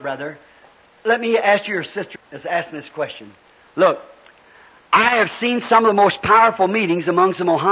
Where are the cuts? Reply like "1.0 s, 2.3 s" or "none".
2.2 s